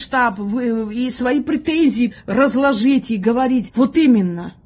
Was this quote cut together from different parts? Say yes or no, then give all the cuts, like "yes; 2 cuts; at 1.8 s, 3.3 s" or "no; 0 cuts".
yes; 2 cuts; at 2.1 s, 3.7 s